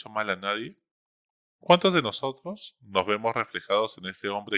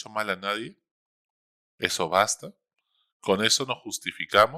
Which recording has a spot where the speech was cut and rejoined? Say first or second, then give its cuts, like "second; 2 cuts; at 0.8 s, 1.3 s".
first; 1 cut; at 1.5 s